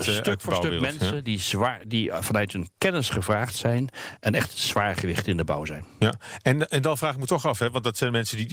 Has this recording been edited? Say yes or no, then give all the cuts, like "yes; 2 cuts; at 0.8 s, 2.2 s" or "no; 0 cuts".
no; 0 cuts